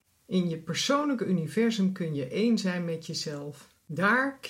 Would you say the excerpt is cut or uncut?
uncut